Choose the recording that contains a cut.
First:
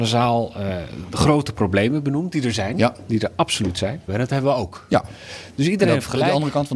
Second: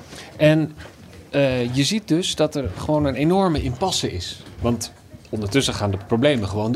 first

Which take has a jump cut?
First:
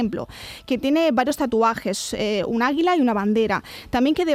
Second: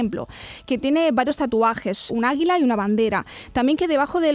second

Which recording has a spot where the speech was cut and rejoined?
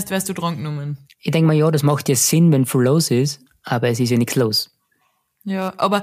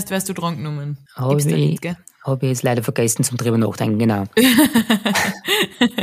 second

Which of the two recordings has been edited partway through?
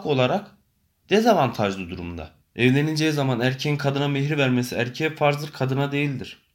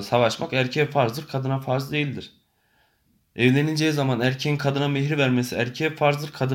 first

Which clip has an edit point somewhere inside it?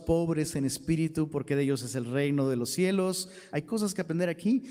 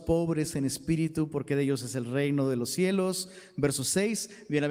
first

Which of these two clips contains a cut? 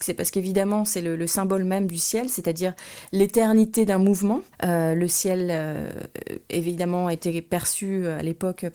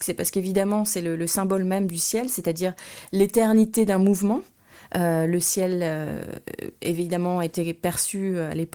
first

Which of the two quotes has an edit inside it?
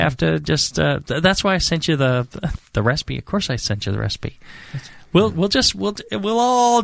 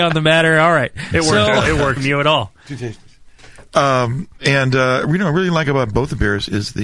second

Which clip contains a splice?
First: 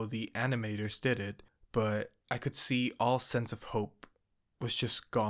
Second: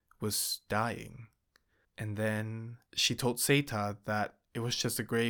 second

